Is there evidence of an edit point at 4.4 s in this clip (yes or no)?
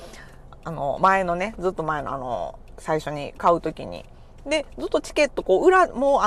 yes